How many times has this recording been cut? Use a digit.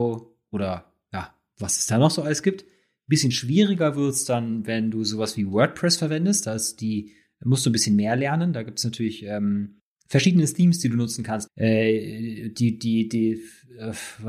1